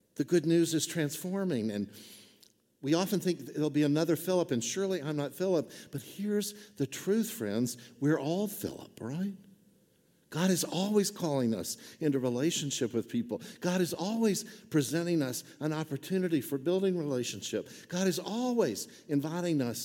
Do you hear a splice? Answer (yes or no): no